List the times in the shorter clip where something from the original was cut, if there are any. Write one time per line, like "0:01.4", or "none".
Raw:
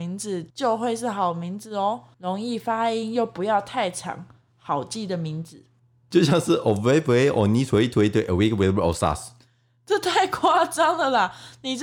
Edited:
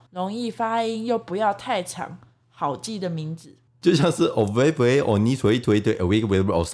0:03.7